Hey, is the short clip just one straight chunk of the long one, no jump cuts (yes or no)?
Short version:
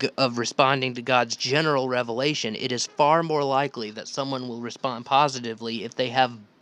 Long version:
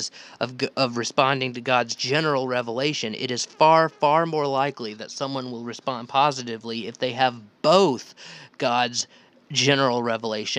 no